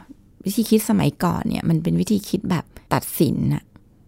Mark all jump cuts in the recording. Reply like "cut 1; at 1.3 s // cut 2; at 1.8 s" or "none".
cut 1; at 2.9 s

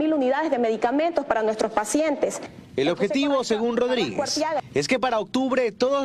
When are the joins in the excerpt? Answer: none

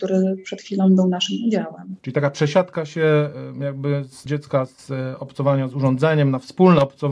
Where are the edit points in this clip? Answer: cut 1; at 2.0 s // cut 2; at 4.3 s

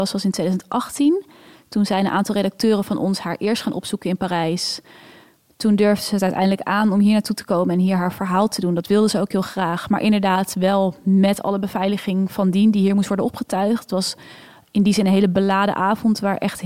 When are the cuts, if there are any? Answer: none

